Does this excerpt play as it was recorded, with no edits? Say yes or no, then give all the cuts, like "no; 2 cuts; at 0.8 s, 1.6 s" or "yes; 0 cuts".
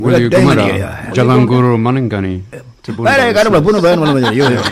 yes; 0 cuts